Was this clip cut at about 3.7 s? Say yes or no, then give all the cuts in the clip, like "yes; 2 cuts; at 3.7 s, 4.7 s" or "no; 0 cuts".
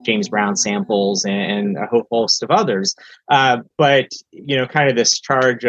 yes; 1 cut; at 3.7 s